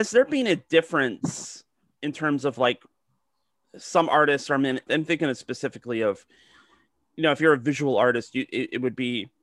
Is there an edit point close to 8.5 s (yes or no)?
no